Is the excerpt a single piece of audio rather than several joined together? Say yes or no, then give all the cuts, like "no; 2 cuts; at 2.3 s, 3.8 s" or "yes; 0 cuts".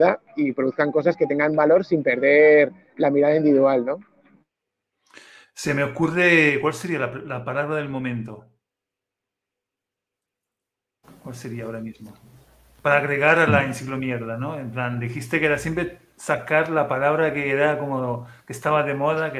yes; 0 cuts